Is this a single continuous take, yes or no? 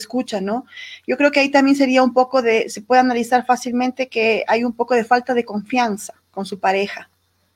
yes